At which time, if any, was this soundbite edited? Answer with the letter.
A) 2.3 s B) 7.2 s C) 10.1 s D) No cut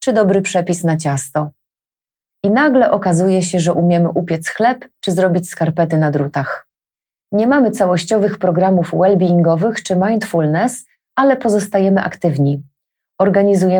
D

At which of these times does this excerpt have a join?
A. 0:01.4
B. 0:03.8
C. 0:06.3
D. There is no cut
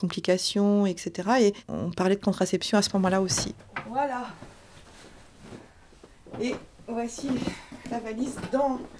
D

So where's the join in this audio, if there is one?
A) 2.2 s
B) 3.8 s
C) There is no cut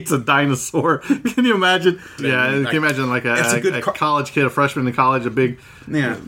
A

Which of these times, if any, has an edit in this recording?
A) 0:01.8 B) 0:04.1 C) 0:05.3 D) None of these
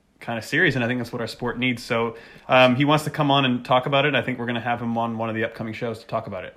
D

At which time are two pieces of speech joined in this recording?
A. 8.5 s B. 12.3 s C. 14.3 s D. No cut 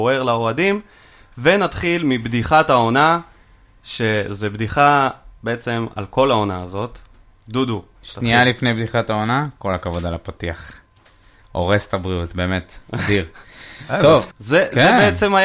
C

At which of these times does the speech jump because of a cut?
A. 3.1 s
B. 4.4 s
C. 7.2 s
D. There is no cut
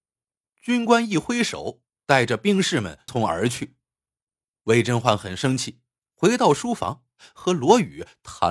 A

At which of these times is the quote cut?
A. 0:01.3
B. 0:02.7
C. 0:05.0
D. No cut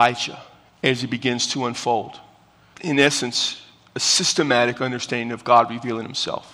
B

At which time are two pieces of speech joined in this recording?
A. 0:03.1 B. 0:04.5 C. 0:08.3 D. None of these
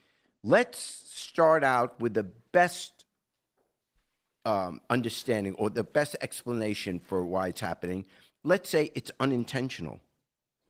D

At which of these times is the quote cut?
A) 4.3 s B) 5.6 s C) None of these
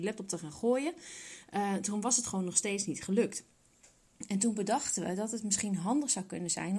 C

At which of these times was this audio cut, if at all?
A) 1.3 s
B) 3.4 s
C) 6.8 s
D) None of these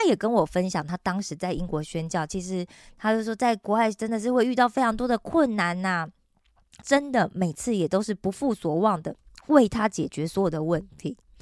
C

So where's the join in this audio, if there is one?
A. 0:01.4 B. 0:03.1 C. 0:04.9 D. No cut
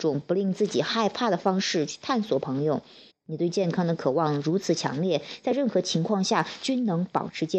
B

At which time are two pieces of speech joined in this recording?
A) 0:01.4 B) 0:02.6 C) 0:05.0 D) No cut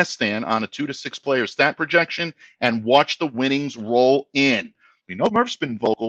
C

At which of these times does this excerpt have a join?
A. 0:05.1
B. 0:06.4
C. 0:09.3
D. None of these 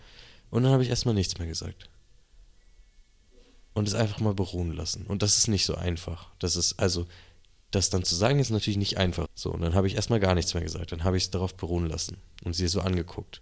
C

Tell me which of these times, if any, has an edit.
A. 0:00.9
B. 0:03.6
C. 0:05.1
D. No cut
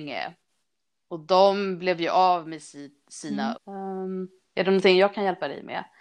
B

